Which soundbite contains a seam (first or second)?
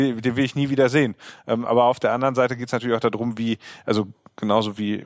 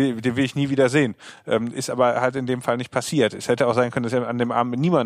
first